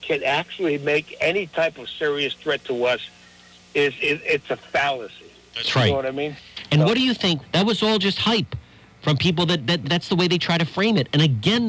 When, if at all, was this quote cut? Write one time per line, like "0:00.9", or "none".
0:07.4
0:09.8